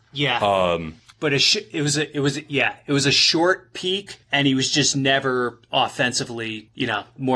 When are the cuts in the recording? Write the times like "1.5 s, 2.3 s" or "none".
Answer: 1.1 s